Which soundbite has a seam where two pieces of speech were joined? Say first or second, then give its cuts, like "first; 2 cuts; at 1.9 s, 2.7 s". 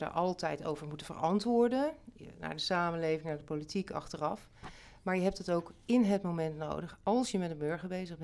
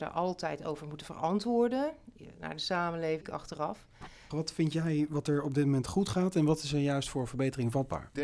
second; 2 cuts; at 3.2 s, 4.3 s